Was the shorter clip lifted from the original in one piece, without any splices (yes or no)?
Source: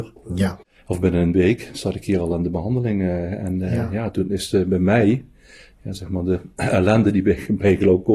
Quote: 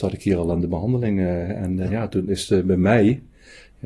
no